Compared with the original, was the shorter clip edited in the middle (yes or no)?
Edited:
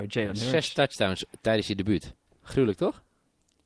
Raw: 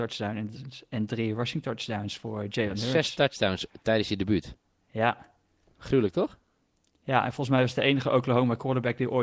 yes